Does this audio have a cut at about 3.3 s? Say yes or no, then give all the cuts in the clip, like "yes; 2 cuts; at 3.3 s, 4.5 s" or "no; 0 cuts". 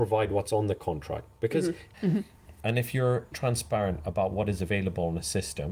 yes; 2 cuts; at 1.9 s, 3.3 s